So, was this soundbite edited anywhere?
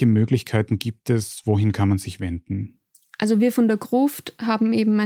no; 0 cuts

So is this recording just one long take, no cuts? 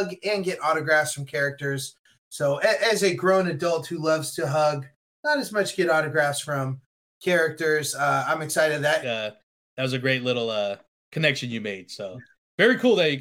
no; 1 cut; at 9.0 s

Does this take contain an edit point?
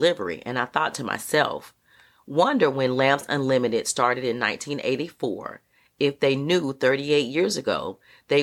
no; 0 cuts

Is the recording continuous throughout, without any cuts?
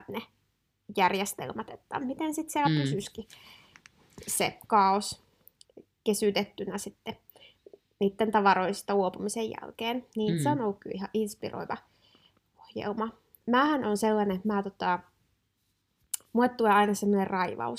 yes; 0 cuts

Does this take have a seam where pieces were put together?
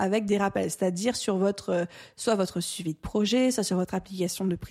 no; 0 cuts

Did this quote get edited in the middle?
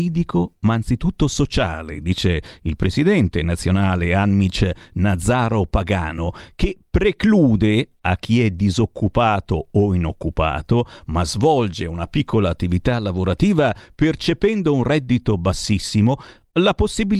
no; 0 cuts

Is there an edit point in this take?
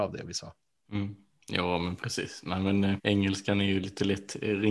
yes; 1 cut; at 3.0 s

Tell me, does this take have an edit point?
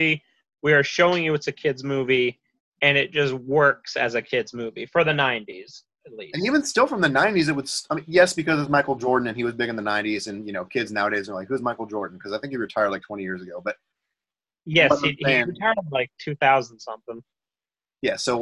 no; 0 cuts

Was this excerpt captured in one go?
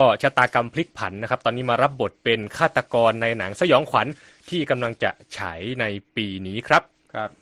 yes; 0 cuts

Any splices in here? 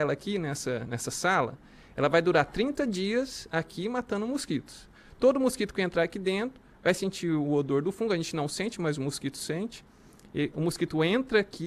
no; 0 cuts

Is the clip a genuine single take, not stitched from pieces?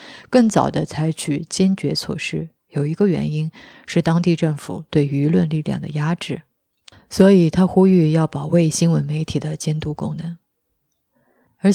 yes; 0 cuts

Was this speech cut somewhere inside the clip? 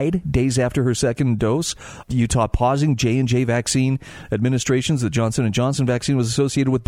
yes; 1 cut; at 2.0 s

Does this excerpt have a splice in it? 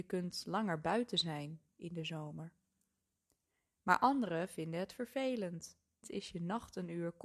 yes; 1 cut; at 6.0 s

